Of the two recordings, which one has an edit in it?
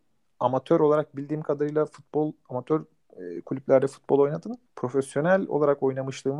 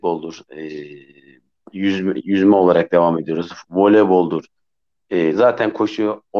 first; 1 cut; at 4.7 s

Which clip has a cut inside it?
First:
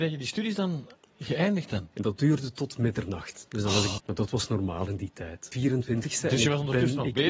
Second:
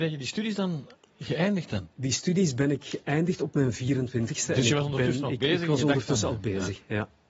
first; 3 cuts; at 1.9 s, 4.0 s, 5.5 s

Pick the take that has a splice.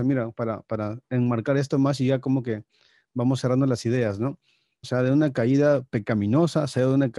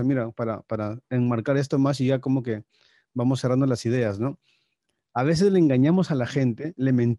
first; 1 cut; at 4.8 s

